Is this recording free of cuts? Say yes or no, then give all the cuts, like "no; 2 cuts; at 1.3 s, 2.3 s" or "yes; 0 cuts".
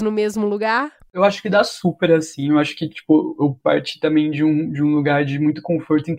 yes; 0 cuts